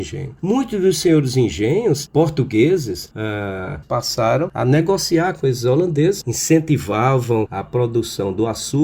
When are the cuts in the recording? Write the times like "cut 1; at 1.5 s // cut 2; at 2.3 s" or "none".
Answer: cut 1; at 3.8 s // cut 2; at 6.2 s